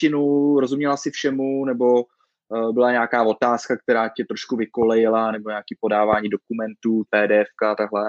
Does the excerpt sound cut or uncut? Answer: cut